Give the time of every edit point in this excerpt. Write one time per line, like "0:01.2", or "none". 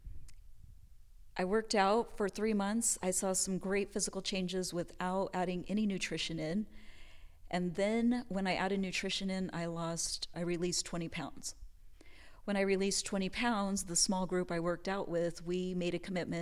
0:10.3